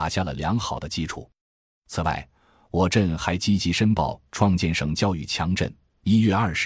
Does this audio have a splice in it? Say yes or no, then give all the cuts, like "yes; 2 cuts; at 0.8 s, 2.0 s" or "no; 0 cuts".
no; 0 cuts